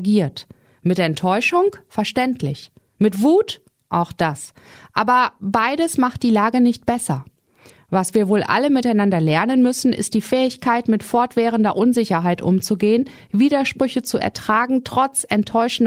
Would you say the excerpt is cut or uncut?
uncut